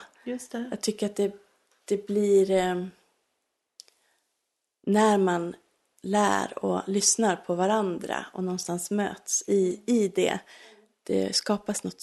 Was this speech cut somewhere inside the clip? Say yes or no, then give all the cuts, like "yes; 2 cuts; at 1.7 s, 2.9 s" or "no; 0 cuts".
no; 0 cuts